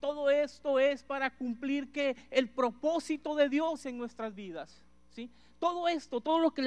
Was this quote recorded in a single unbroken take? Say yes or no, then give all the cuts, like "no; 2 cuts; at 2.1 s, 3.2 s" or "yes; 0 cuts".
yes; 0 cuts